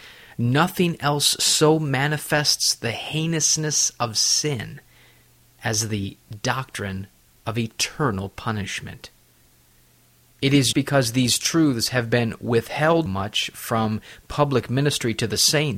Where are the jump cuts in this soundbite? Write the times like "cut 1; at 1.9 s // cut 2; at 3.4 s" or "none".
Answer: cut 1; at 10.7 s // cut 2; at 13.1 s